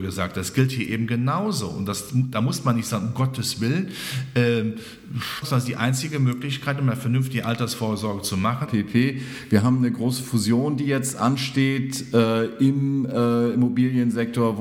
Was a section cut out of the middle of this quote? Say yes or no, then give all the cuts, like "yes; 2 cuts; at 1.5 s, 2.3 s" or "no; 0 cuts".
yes; 2 cuts; at 5.4 s, 8.7 s